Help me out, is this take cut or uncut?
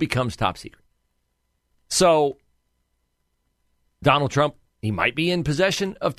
cut